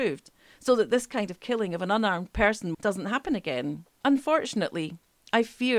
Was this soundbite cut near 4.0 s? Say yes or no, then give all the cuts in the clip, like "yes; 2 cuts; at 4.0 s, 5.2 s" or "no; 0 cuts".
yes; 2 cuts; at 2.7 s, 4.0 s